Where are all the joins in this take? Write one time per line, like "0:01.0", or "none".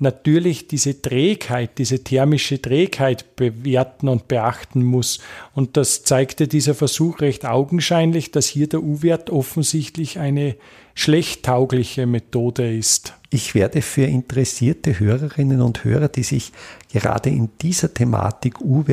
none